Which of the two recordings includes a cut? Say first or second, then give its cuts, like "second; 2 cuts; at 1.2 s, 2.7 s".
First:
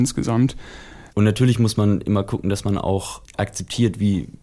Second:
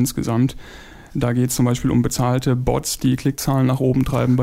first; 1 cut; at 1.1 s